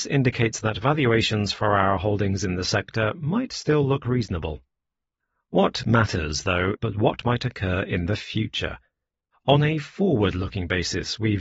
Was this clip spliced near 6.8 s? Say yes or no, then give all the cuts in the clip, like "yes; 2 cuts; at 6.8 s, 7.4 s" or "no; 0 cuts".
yes; 1 cut; at 6.8 s